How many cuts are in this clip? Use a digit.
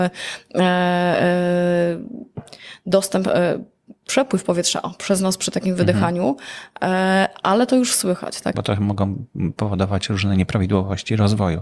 1